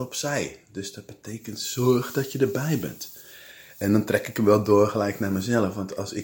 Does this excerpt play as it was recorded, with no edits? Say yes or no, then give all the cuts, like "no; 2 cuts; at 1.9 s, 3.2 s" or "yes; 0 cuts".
yes; 0 cuts